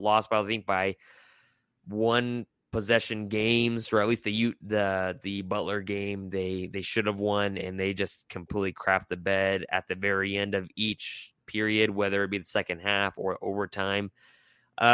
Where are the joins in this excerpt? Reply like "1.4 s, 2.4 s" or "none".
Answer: none